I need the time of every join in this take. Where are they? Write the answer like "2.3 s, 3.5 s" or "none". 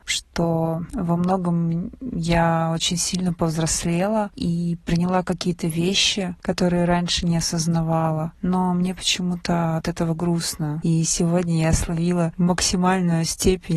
10.8 s